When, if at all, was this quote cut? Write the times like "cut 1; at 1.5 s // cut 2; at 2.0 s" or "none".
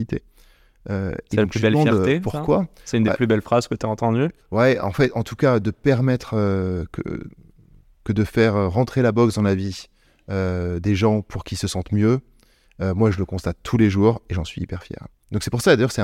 none